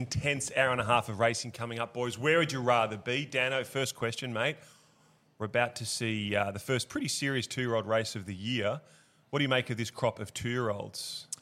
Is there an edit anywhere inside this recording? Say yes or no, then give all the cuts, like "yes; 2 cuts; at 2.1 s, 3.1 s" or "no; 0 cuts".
no; 0 cuts